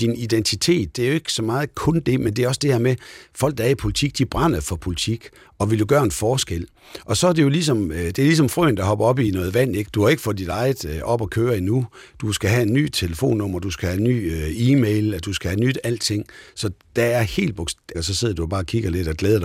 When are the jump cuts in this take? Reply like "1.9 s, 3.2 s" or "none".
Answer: 9.8 s, 17.9 s